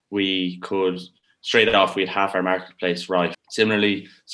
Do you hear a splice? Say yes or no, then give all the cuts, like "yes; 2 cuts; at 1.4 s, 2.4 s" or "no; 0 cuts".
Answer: yes; 1 cut; at 3.3 s